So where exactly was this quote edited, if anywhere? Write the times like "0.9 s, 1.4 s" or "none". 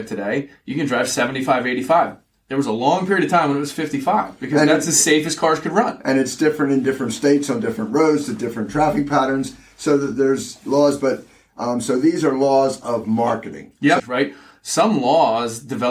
14.0 s